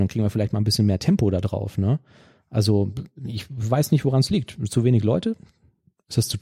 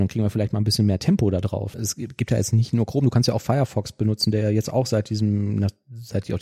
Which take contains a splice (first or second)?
second